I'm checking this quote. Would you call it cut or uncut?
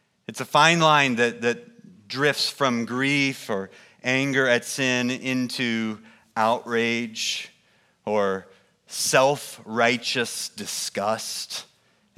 uncut